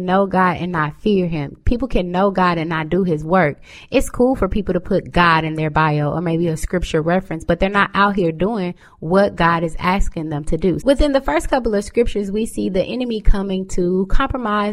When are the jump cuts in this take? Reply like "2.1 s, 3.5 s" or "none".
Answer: 10.8 s